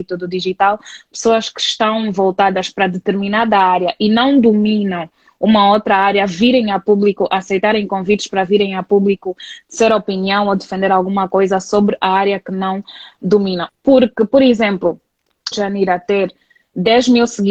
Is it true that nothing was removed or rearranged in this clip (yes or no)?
no